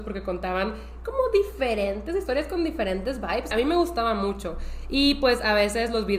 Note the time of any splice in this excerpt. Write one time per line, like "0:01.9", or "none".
0:03.5